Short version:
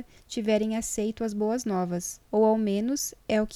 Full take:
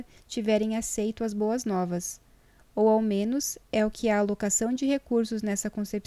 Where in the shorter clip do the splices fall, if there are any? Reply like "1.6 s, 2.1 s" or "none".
2.2 s